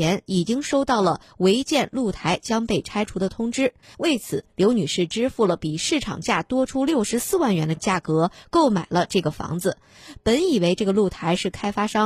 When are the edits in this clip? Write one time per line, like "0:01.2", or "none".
0:03.8